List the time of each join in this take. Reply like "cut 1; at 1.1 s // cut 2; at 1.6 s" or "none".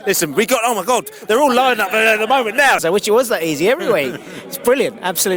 cut 1; at 2.8 s